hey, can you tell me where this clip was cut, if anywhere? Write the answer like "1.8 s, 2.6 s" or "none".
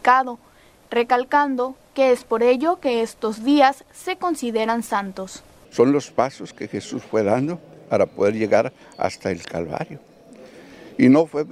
5.6 s